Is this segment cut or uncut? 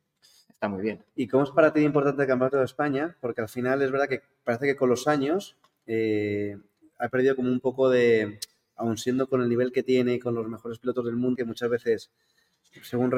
cut